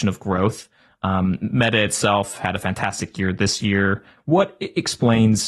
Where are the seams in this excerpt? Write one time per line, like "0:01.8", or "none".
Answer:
0:04.2